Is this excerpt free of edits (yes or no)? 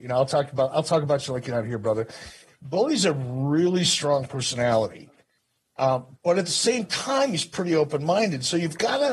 yes